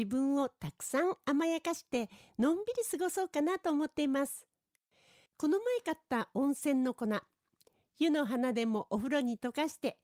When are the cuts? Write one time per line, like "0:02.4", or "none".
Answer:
0:05.3